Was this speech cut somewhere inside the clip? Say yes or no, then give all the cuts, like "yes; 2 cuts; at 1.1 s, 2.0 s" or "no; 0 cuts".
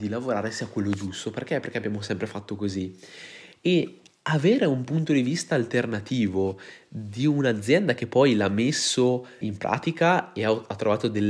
yes; 1 cut; at 9.4 s